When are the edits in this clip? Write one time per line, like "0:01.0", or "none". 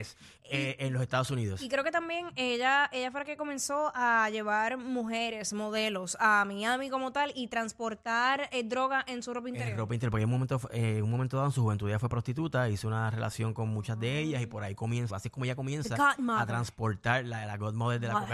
0:15.1

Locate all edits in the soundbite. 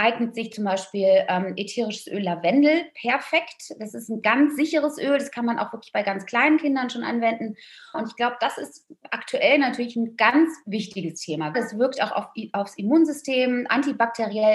0:07.9
0:11.5

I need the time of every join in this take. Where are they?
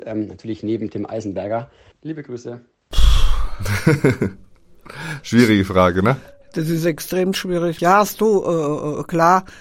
0:01.9
0:07.8

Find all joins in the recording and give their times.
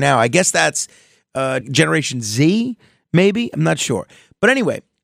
0:01.6

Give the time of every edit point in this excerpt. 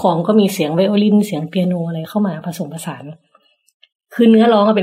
none

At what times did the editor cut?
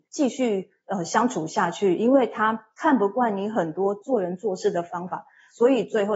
none

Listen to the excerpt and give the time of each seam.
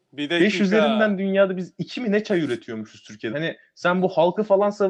0:03.3

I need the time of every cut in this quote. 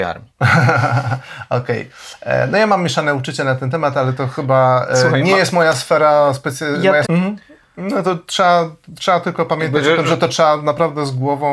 0:07.0

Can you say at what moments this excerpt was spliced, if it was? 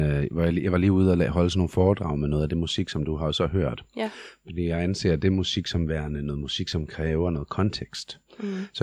none

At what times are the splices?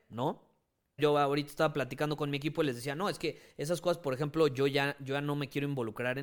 0:01.0

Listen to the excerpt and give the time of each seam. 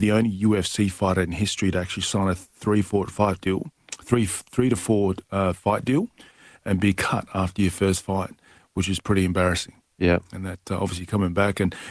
none

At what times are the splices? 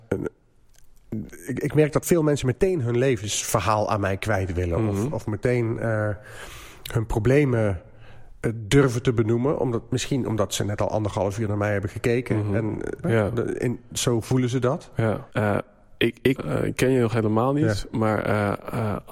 0:13.0
0:15.3
0:16.4

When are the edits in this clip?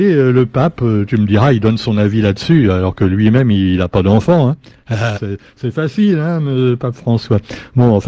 0:05.1

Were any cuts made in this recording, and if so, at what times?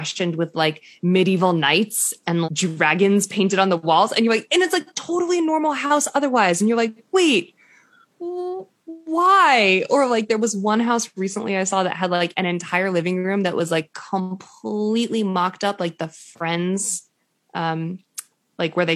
0:02.4

